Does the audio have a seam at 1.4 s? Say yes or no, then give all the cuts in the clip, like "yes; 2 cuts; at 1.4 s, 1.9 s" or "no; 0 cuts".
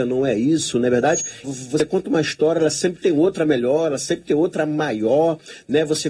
yes; 1 cut; at 1.4 s